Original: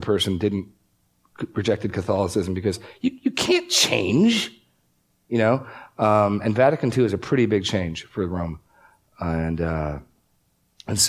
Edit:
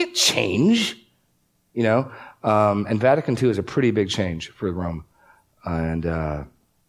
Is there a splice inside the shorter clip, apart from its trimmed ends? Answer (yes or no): no